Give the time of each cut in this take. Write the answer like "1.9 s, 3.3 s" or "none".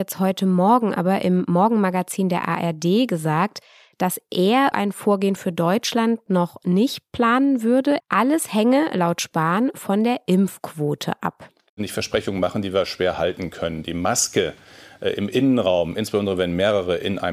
4.7 s, 8.0 s, 11.7 s